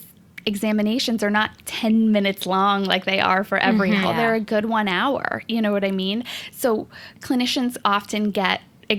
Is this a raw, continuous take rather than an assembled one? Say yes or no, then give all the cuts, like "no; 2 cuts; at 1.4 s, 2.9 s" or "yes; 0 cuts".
no; 1 cut; at 4.0 s